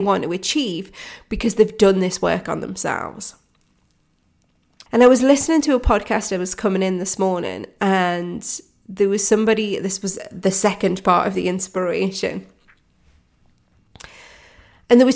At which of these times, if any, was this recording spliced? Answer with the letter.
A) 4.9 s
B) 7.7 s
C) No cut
A